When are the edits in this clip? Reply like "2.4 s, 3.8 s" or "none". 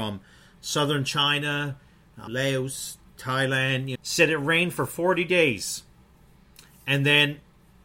2.3 s, 3.9 s